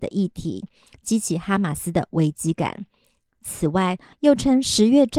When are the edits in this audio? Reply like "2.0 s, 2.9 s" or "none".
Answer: 4.1 s

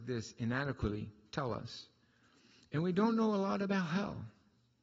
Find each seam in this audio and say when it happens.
none

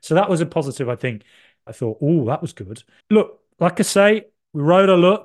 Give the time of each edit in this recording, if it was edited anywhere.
1.7 s, 3.0 s

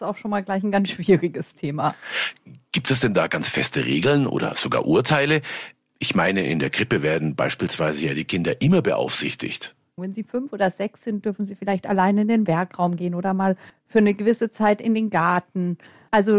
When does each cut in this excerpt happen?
10.0 s

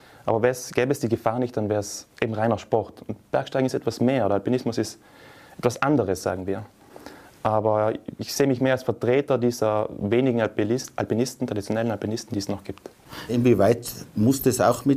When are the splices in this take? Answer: 7.2 s, 13.3 s

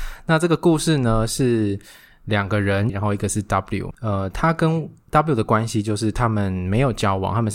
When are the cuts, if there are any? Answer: 2.9 s, 3.9 s

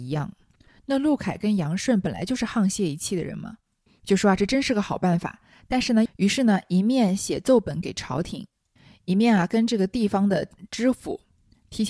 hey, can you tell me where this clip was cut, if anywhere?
6.1 s

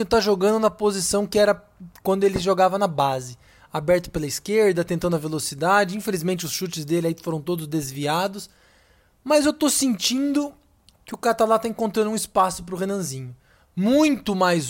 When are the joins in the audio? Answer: none

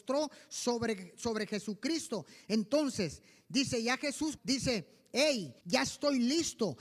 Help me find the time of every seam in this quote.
2.4 s, 4.4 s, 5.6 s

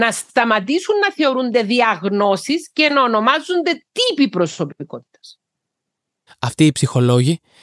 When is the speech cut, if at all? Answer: 6.3 s

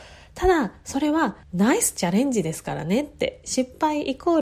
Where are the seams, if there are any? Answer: 1.4 s, 3.4 s

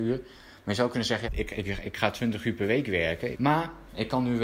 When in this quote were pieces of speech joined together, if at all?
1.2 s, 3.3 s

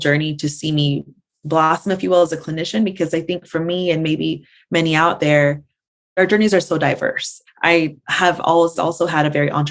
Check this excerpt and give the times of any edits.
7.5 s, 8.8 s

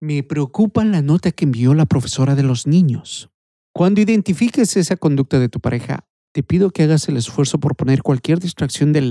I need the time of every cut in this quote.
3.6 s

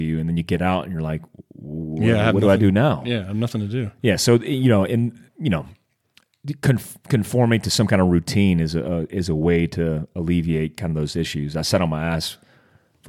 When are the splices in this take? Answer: none

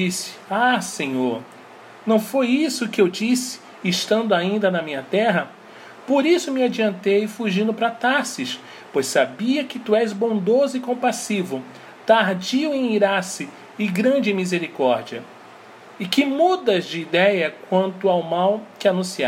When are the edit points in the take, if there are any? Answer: none

